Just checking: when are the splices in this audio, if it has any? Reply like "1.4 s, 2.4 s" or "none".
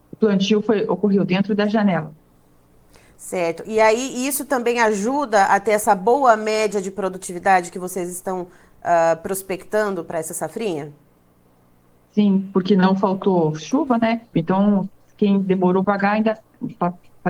14.3 s, 15.8 s